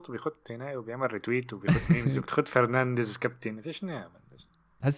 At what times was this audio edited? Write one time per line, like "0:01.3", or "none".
0:02.3

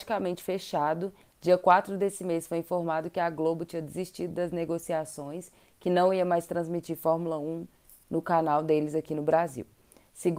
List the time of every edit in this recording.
0:01.2

